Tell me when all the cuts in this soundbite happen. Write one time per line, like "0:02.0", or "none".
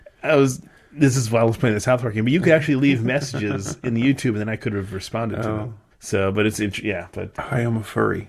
0:05.9
0:07.3